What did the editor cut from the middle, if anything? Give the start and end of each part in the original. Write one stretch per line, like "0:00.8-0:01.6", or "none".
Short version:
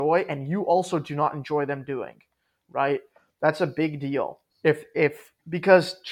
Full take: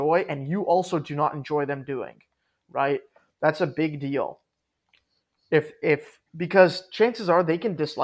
0:04.5-0:05.4

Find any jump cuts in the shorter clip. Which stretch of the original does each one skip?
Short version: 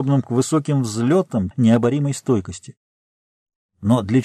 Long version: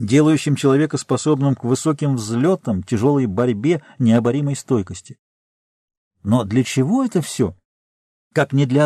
0:02.8-0:03.9

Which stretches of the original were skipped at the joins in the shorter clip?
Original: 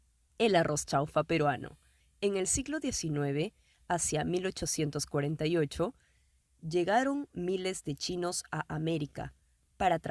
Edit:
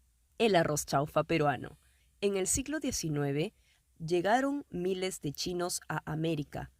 0:03.8-0:06.4

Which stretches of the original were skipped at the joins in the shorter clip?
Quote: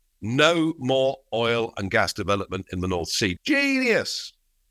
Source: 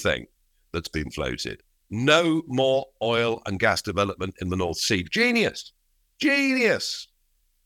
0:05.0-0:06.1

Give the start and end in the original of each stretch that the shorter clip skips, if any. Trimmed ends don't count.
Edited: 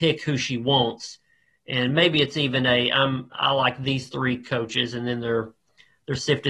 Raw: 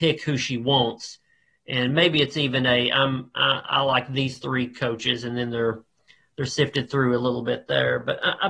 0:03.3-0:03.6

